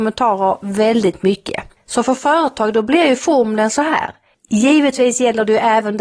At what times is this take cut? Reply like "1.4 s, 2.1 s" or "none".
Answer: 4.3 s